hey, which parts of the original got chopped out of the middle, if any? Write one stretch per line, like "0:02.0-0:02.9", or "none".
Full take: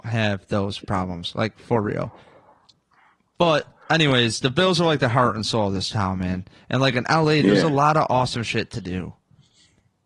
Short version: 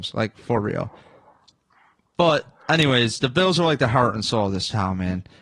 none